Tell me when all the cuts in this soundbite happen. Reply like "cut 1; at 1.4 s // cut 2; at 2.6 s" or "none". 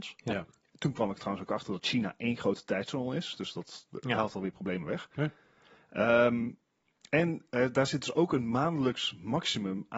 none